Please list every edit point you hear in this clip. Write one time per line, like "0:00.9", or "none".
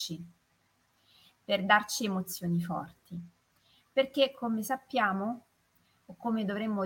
none